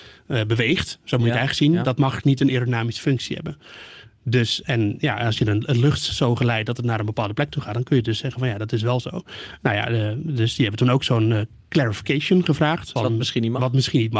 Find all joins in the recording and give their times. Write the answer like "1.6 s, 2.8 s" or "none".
13.0 s